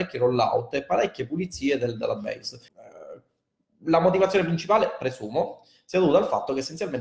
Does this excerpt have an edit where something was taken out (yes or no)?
yes